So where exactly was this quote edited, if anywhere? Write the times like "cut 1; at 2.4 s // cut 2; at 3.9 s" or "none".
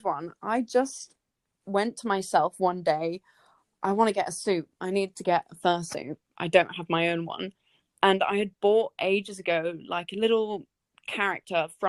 none